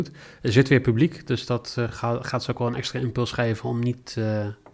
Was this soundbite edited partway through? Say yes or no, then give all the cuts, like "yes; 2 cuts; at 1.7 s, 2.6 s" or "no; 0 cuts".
no; 0 cuts